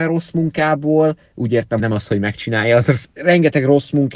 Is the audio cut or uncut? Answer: cut